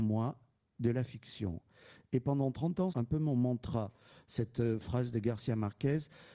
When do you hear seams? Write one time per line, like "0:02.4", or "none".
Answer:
0:02.9